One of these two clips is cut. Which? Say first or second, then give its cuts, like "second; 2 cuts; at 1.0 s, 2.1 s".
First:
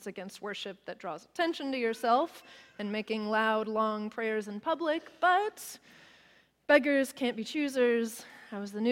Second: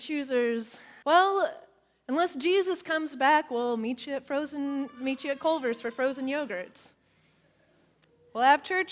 second; 1 cut; at 1.0 s